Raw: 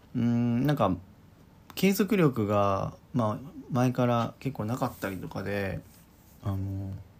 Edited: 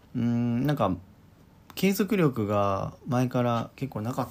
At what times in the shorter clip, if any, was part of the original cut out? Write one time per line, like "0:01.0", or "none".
0:03.0